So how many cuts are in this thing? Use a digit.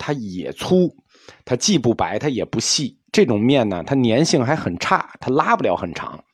0